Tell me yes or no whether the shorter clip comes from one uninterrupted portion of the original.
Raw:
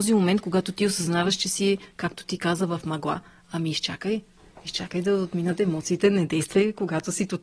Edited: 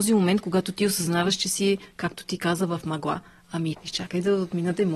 no